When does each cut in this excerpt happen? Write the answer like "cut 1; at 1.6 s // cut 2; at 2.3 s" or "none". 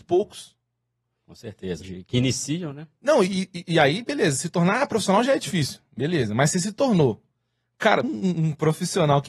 cut 1; at 1.8 s // cut 2; at 8.0 s